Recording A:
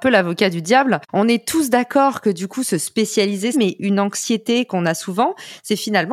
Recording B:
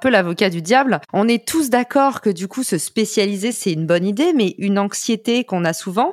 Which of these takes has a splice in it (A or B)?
A